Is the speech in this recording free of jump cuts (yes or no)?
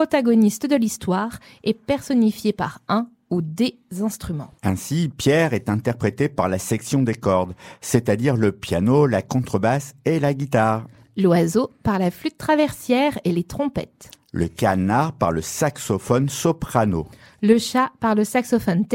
no